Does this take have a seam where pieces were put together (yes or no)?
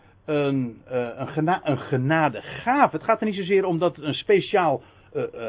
no